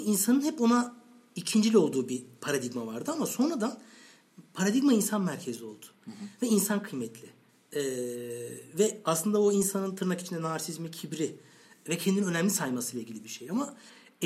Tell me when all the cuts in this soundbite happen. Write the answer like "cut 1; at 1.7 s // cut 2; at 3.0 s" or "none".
none